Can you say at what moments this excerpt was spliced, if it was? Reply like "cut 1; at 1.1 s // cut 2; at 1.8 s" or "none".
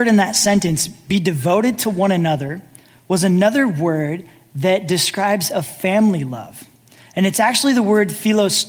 none